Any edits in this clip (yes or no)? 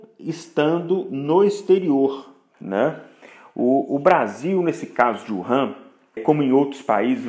yes